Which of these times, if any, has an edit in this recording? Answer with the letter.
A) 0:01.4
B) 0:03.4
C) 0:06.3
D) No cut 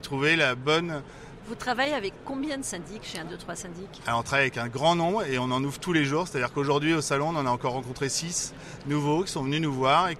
A